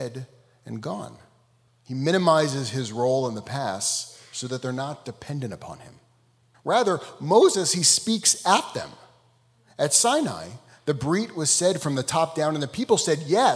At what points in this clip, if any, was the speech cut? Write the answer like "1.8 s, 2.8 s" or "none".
1.7 s, 6.5 s